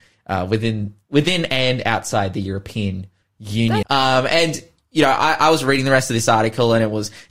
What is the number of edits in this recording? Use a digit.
1